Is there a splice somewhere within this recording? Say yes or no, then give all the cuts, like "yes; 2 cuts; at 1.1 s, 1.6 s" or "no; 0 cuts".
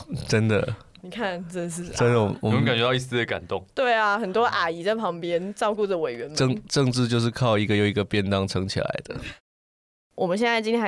no; 0 cuts